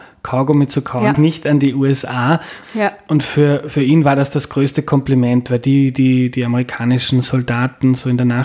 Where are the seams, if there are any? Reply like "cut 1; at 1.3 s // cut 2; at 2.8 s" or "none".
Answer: cut 1; at 1.1 s // cut 2; at 2.6 s